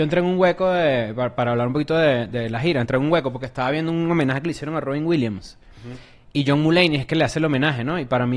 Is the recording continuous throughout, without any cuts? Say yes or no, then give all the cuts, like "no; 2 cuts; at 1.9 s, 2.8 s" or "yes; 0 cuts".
yes; 0 cuts